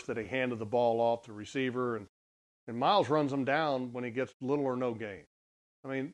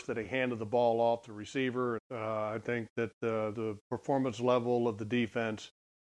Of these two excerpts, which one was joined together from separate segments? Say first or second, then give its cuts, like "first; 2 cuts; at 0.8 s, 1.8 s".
second; 2 cuts; at 2.0 s, 3.5 s